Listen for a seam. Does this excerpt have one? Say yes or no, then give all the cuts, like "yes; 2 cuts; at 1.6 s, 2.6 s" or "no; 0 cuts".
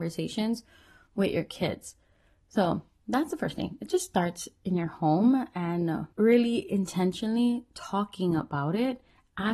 yes; 1 cut; at 6.1 s